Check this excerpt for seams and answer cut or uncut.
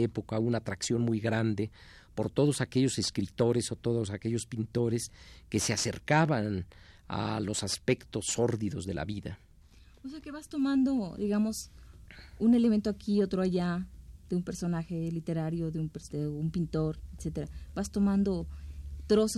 cut